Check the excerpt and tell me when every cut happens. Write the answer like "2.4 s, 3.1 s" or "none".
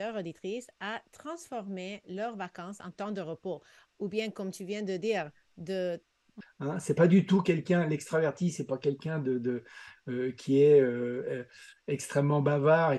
6.4 s